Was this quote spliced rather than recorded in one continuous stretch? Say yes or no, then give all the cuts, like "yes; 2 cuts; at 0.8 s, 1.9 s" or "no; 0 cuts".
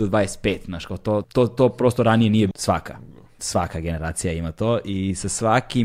yes; 2 cuts; at 1.2 s, 2.5 s